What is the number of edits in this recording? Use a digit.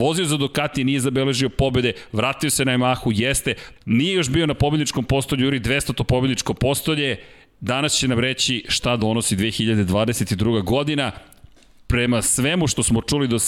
1